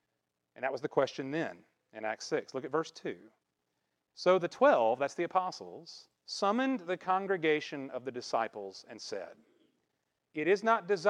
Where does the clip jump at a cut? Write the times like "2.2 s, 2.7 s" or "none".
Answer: 6.2 s